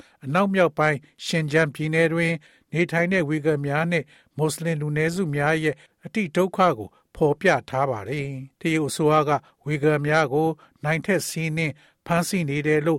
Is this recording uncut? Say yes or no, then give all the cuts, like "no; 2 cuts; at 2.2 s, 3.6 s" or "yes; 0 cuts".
no; 1 cut; at 8.5 s